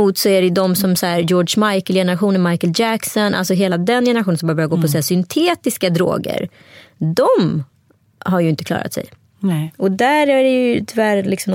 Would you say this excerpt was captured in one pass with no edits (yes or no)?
yes